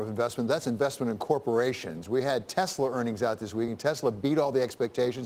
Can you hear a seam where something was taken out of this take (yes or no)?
no